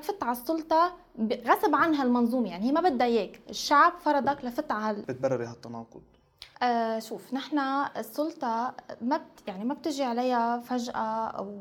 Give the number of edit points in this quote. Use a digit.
2